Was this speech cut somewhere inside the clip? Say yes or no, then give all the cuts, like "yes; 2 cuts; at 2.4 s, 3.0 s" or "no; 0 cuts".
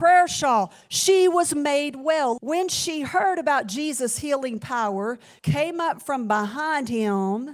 yes; 2 cuts; at 2.4 s, 5.4 s